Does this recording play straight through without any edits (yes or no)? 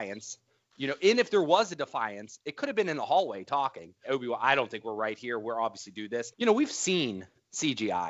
no